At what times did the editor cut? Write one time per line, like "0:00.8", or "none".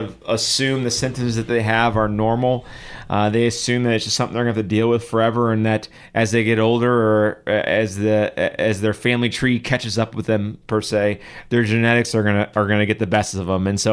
none